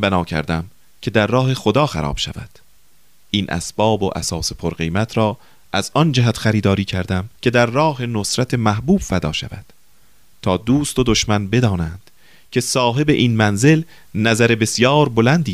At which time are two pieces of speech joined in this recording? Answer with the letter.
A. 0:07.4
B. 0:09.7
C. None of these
A